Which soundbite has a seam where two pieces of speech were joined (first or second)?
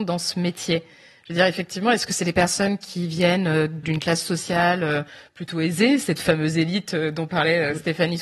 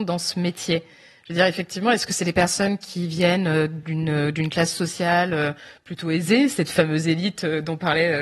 first